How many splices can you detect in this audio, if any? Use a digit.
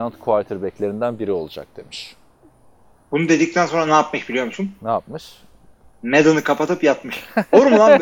0